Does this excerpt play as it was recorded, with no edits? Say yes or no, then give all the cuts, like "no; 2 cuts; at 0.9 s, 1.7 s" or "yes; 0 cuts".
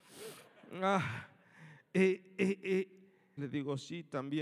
no; 1 cut; at 3.4 s